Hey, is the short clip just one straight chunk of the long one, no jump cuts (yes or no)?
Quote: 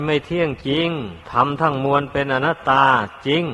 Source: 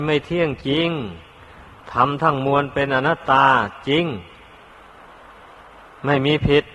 no